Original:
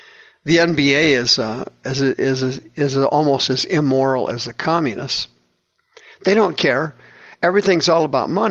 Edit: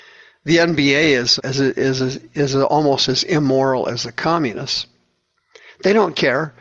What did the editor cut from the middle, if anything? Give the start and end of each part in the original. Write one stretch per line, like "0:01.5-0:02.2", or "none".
0:01.4-0:01.8